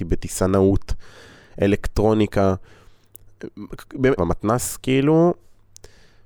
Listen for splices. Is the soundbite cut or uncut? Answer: cut